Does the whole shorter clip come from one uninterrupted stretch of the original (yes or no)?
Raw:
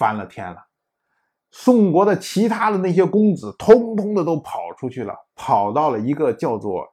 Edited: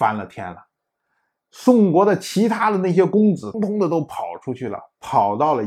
no